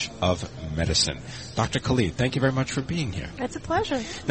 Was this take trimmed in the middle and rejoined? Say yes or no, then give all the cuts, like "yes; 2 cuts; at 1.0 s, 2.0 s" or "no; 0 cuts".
no; 0 cuts